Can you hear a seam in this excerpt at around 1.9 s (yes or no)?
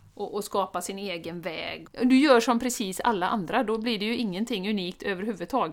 yes